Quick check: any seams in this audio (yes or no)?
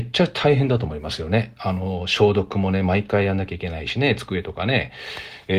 no